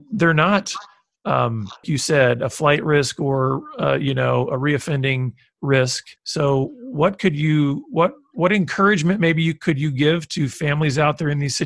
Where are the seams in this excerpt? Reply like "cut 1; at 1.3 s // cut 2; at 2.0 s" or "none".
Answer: cut 1; at 1.8 s // cut 2; at 6.2 s